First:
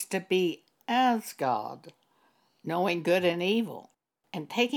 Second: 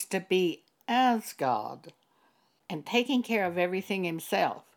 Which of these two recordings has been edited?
second; 1 cut; at 2.6 s

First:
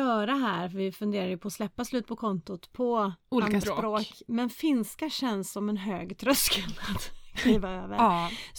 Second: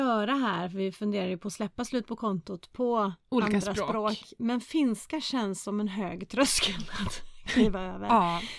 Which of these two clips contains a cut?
first; 1 cut; at 3.6 s

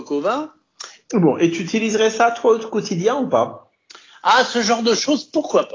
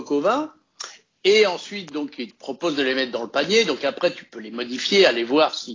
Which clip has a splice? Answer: first; 1 cut; at 1.0 s

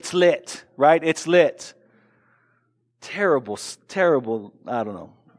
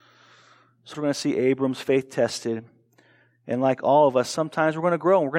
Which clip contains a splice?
second; 1 cut; at 0.9 s

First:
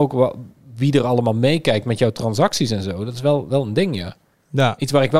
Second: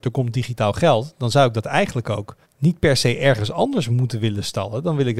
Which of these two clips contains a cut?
second; 1 cut; at 2.4 s

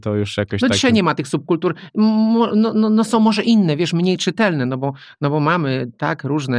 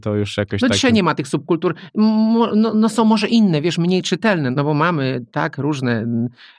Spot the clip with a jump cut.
second; 2 cuts; at 2.7 s, 4.5 s

